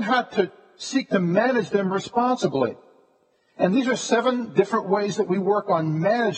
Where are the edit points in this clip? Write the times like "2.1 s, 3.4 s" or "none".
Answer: none